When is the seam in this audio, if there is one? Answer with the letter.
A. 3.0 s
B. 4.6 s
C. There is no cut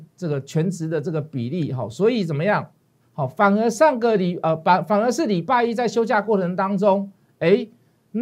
A